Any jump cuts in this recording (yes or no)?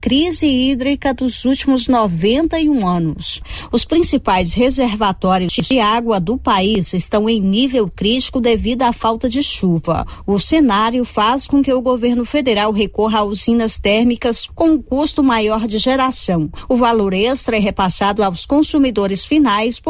no